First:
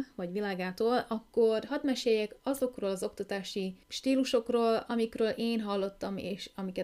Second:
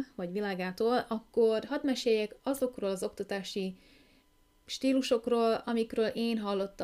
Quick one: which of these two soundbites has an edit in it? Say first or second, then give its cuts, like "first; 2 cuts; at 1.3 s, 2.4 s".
first; 1 cut; at 3.8 s